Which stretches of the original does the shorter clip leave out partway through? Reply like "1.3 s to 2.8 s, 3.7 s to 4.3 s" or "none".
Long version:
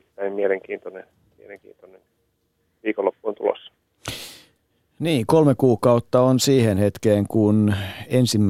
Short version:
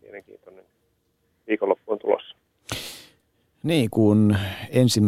5.3 s to 7.3 s